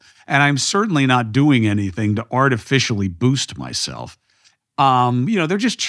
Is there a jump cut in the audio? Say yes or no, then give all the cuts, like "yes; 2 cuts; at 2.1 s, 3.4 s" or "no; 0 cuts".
yes; 1 cut; at 4.6 s